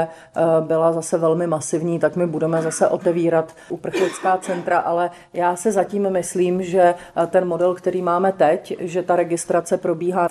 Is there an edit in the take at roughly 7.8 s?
no; 0 cuts

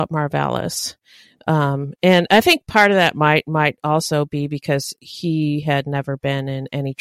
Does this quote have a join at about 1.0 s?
no; 0 cuts

